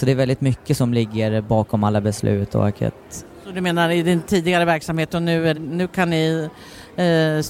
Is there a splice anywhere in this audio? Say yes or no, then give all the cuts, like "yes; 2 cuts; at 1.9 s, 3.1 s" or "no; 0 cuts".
yes; 1 cut; at 5.5 s